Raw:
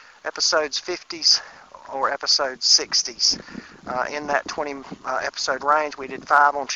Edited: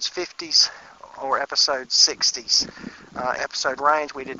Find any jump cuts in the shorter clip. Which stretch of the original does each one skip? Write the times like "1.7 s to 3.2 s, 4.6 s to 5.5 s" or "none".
4.1 s to 5.2 s